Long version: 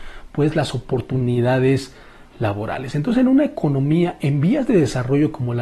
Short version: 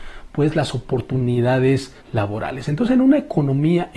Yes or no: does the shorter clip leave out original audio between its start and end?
yes